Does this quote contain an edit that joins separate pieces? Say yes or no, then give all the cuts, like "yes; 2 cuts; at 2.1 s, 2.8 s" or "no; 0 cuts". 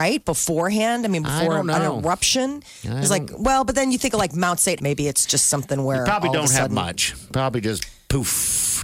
yes; 1 cut; at 4.8 s